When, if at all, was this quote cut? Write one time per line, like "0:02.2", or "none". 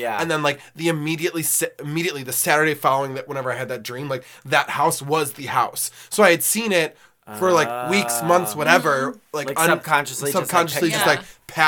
none